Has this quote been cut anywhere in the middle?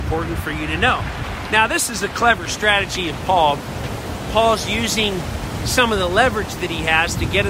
no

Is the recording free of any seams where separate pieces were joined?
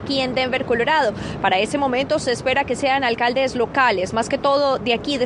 yes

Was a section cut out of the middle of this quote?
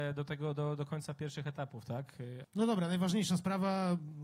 yes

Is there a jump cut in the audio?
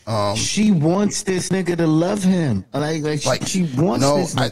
yes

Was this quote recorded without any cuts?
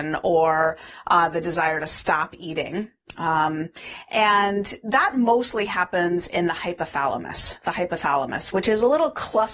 yes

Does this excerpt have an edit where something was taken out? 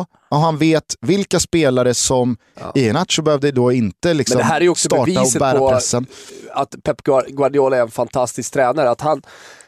yes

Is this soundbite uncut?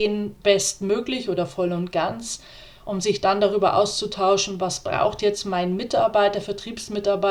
yes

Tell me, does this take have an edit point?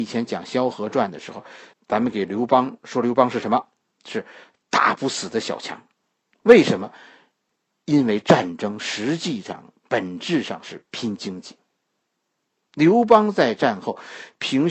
yes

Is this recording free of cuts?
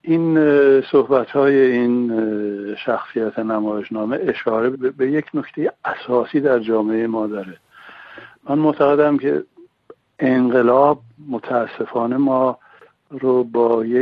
no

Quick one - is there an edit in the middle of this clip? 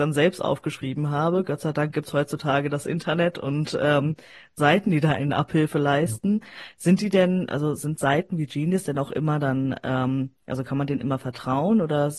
no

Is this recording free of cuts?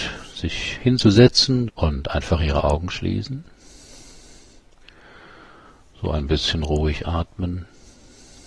no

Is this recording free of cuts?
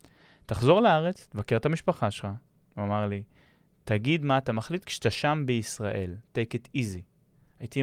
yes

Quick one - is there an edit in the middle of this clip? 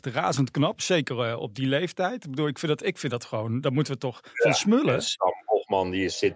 no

